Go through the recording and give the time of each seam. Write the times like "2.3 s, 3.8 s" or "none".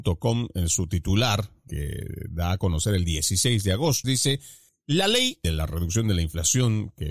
4.0 s